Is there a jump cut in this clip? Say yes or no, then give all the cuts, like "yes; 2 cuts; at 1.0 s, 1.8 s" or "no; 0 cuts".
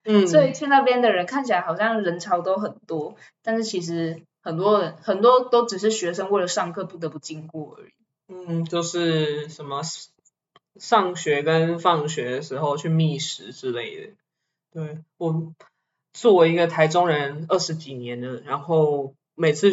no; 0 cuts